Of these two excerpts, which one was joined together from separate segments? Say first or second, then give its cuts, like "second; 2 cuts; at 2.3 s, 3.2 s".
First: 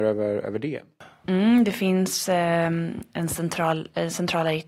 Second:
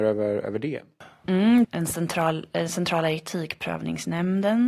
second; 1 cut; at 1.6 s